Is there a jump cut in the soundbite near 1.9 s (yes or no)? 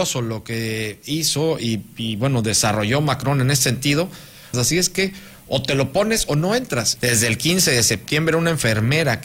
no